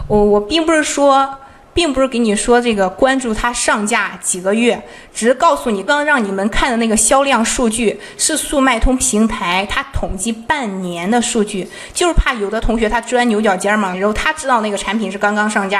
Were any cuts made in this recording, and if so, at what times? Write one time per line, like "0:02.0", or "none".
0:05.9
0:13.9